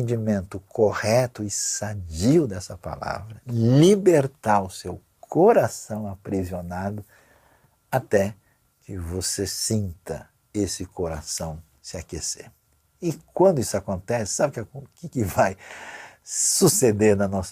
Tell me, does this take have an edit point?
no; 0 cuts

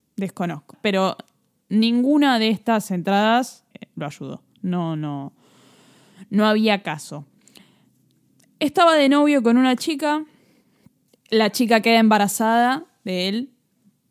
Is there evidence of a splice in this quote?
no; 0 cuts

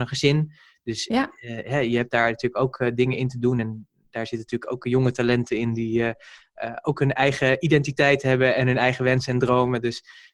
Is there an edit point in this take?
no; 0 cuts

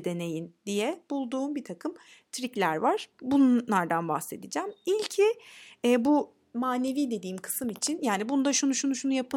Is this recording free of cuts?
yes; 0 cuts

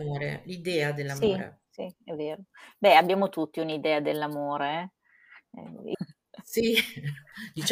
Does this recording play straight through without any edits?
no; 1 cut; at 5.9 s

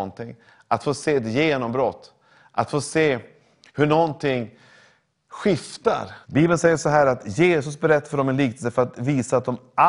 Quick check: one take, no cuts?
no; 1 cut; at 6.2 s

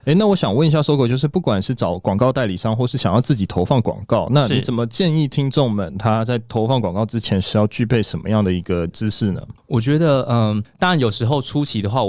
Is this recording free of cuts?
yes; 0 cuts

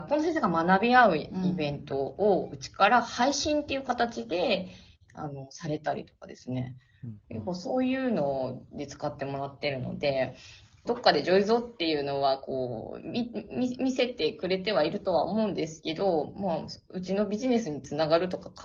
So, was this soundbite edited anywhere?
yes; 1 cut; at 10.9 s

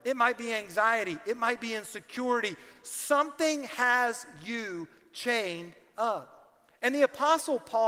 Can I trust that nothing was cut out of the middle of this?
yes; 0 cuts

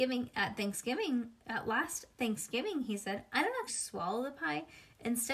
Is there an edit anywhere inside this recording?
yes; 1 cut; at 3.7 s

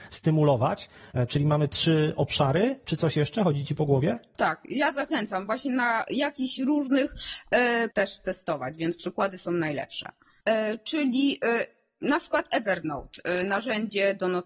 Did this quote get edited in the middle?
yes; 3 cuts; at 4.3 s, 7.9 s, 10.4 s

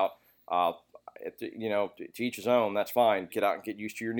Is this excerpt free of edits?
no; 1 cut; at 3.3 s

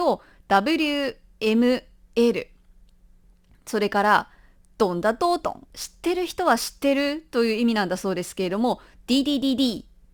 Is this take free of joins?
no; 1 cut; at 5.7 s

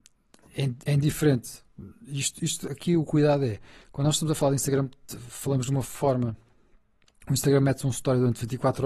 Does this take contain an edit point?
no; 0 cuts

